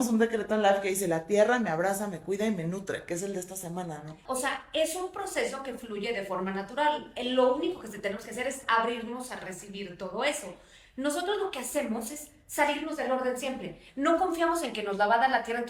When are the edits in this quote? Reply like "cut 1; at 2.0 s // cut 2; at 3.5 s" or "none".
cut 1; at 4.3 s